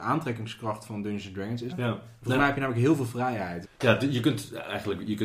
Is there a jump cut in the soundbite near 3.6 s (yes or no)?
yes